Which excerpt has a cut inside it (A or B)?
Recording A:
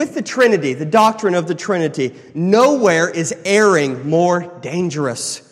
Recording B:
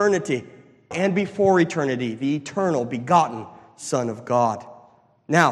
B